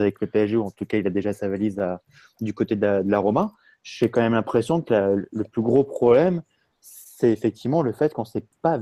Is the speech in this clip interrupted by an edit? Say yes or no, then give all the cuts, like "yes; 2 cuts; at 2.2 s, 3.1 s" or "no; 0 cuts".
no; 0 cuts